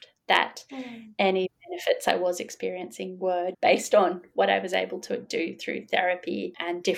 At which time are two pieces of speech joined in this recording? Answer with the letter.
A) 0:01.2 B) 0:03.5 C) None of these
B